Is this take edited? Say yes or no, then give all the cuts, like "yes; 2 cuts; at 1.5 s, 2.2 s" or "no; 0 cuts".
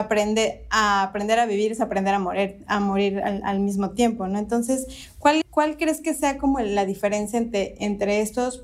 yes; 1 cut; at 5.4 s